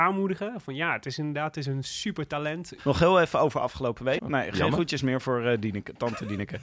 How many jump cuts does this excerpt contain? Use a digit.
2